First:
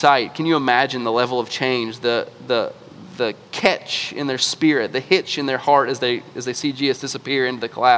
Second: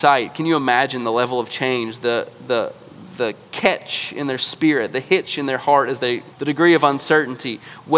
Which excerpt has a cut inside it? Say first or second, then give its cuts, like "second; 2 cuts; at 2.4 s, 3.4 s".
second; 1 cut; at 6.3 s